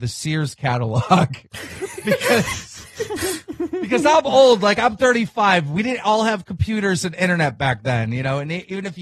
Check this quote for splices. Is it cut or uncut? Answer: uncut